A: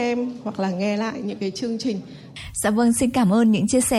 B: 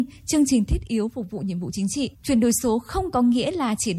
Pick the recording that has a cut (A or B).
B